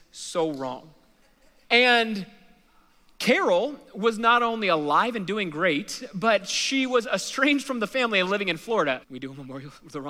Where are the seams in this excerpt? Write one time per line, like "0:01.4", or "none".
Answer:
0:01.6
0:09.0